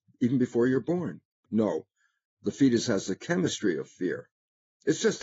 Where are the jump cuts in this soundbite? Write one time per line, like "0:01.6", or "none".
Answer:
0:01.5